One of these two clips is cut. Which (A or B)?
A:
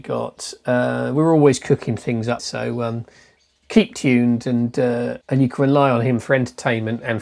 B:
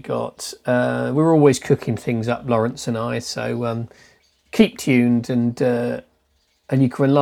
A